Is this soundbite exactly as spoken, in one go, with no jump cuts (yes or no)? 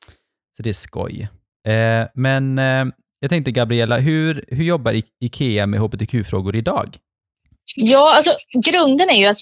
yes